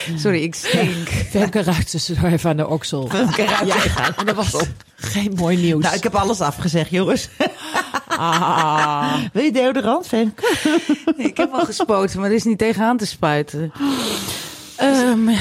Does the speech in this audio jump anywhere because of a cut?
no; 0 cuts

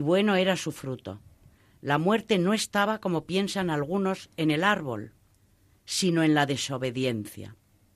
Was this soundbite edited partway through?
no; 0 cuts

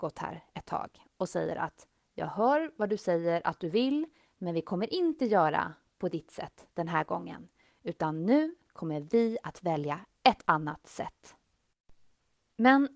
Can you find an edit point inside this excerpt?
no; 0 cuts

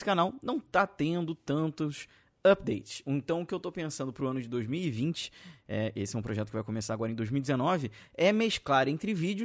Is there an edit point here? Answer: no; 0 cuts

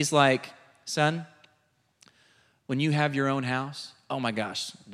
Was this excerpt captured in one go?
yes; 0 cuts

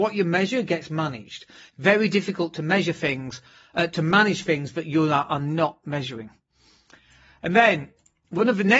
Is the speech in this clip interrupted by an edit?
no; 0 cuts

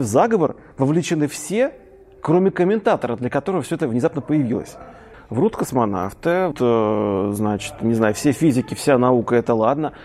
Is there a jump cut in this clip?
yes; 2 cuts; at 5.1 s, 6.5 s

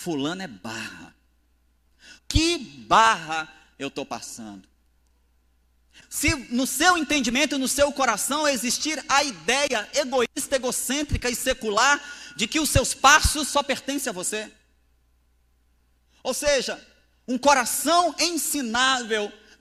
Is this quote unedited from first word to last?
no; 2 cuts; at 2.2 s, 6.0 s

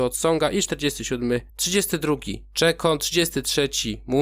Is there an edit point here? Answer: yes; 1 cut; at 1.5 s

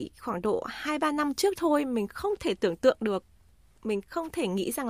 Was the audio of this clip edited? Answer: no; 0 cuts

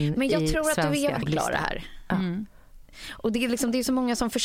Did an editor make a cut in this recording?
yes; 1 cut; at 1.2 s

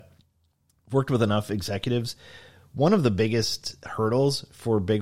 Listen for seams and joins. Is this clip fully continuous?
yes; 0 cuts

